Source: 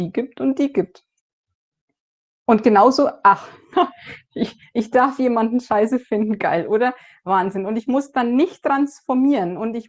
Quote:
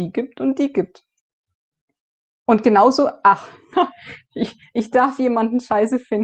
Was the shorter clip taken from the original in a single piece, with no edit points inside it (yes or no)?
yes